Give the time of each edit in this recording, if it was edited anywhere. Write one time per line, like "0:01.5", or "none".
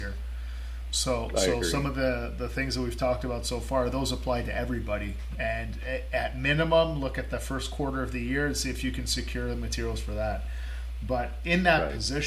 0:05.4